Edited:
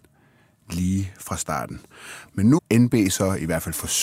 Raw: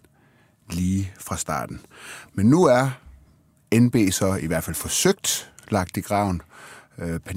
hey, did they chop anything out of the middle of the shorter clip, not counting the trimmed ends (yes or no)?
yes